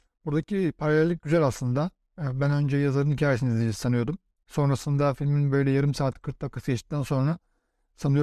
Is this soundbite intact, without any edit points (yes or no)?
yes